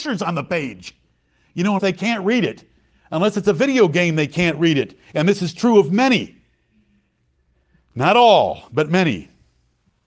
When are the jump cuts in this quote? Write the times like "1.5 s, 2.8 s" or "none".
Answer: 1.8 s